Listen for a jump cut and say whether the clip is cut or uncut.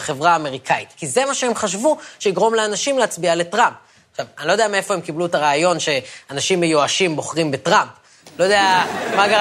uncut